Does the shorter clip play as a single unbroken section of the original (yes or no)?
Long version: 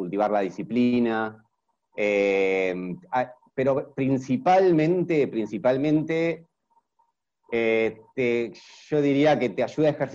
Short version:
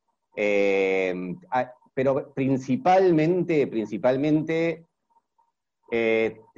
yes